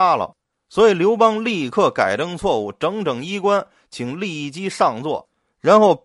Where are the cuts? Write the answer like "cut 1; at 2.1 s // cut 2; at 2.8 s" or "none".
none